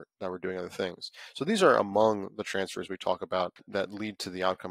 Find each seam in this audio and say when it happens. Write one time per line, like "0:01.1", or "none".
none